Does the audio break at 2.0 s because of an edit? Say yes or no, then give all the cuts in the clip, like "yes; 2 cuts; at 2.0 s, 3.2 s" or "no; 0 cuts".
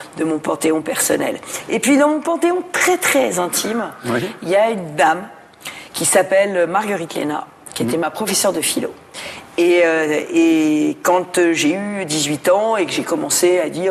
no; 0 cuts